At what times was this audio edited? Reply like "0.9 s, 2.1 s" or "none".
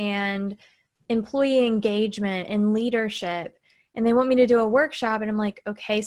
none